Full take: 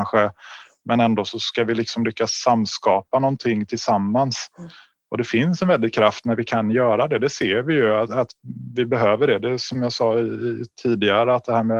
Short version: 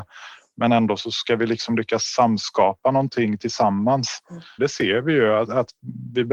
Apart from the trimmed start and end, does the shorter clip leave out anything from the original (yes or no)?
yes